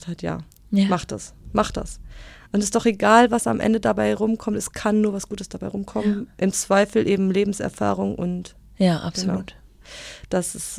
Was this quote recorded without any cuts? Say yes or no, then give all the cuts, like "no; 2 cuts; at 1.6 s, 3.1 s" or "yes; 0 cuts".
yes; 0 cuts